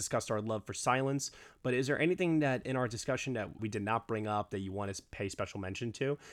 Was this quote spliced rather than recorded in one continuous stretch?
yes; 1 cut; at 3.6 s

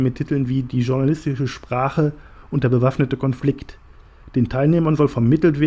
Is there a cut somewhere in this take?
no; 0 cuts

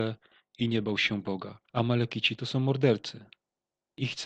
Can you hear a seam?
no; 0 cuts

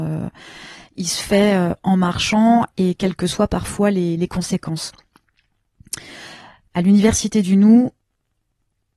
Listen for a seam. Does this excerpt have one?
no; 0 cuts

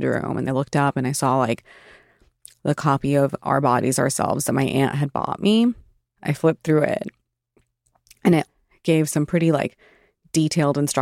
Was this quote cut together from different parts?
no; 0 cuts

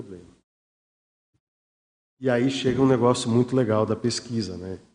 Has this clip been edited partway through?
yes; 1 cut; at 2.0 s

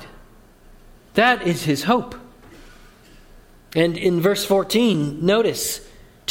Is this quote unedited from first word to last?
yes; 0 cuts

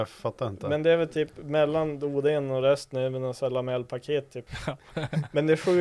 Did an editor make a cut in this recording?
yes; 1 cut; at 4.5 s

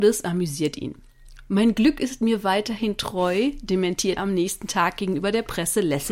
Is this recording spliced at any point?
yes; 1 cut; at 4.2 s

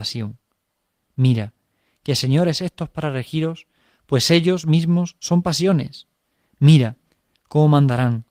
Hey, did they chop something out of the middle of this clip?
no; 0 cuts

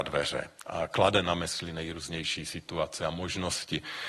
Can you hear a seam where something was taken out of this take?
no; 0 cuts

